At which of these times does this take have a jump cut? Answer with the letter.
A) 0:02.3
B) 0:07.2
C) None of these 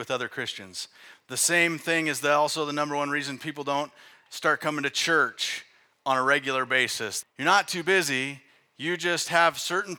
B